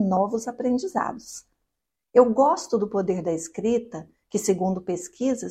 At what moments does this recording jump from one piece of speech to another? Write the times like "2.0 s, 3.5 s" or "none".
none